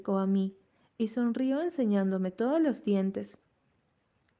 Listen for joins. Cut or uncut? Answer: uncut